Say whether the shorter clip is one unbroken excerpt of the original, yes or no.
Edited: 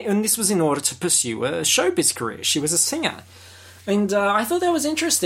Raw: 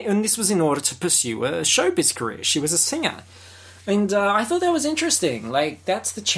yes